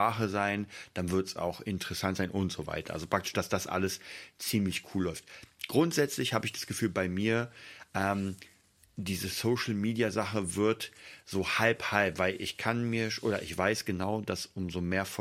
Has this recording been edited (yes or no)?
no